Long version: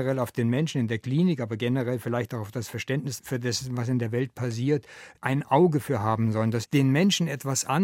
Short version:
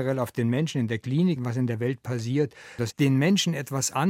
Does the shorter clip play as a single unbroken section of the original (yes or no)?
no